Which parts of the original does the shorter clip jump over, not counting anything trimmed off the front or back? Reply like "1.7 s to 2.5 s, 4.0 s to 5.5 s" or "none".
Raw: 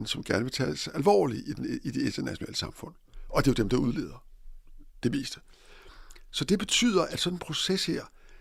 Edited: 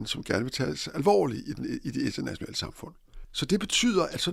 3.2 s to 6.2 s